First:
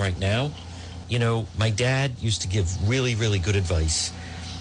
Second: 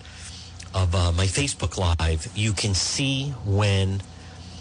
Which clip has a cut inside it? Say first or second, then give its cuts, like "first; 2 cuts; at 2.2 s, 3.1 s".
first; 1 cut; at 1.0 s